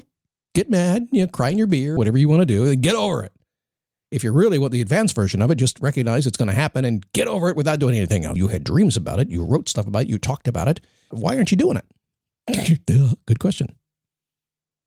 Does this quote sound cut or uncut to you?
cut